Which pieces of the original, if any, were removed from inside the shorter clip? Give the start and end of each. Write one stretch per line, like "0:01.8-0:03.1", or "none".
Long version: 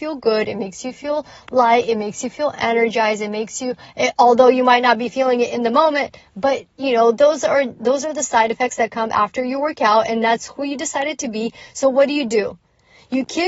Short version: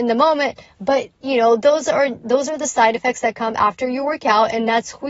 none